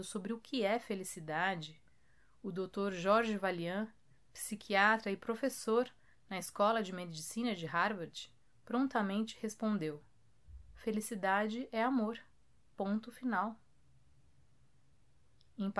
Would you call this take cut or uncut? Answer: uncut